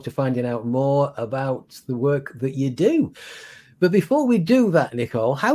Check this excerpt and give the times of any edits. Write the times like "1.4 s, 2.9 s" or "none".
none